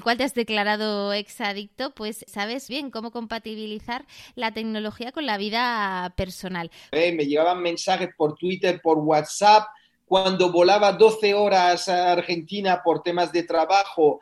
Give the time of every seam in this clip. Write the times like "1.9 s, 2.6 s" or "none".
2.7 s, 6.9 s